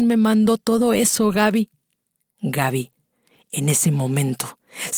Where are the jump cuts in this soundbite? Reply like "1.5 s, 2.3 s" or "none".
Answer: 2.3 s